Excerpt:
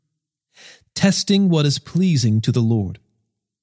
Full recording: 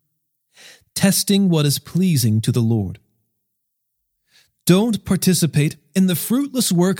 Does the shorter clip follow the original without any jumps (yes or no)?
yes